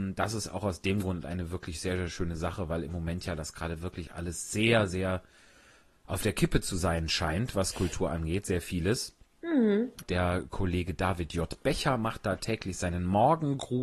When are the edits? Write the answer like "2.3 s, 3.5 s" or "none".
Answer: 10.0 s